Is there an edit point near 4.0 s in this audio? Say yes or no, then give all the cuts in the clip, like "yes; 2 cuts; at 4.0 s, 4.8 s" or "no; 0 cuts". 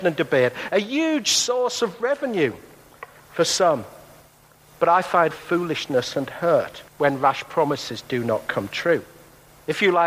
no; 2 cuts; at 5.3 s, 6.9 s